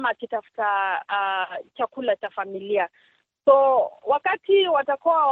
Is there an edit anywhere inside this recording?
no; 0 cuts

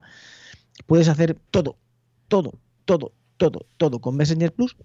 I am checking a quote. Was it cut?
yes; 1 cut; at 1.5 s

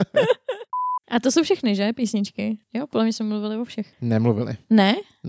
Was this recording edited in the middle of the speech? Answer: no; 0 cuts

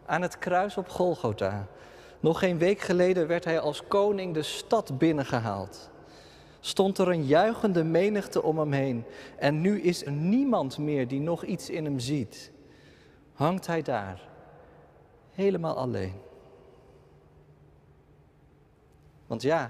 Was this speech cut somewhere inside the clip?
yes; 1 cut; at 10.1 s

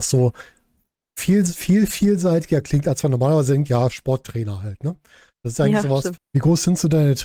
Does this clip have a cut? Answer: yes; 1 cut; at 6.2 s

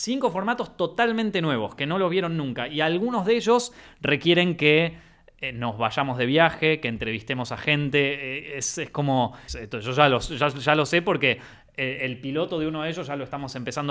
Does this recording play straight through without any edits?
no; 1 cut; at 9.5 s

